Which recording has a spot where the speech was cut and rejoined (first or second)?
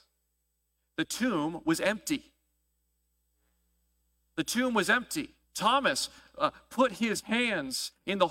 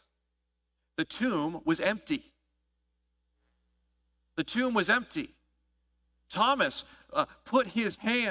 first